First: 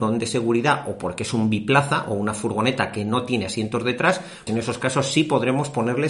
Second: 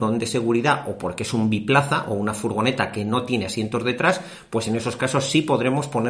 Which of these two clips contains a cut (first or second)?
first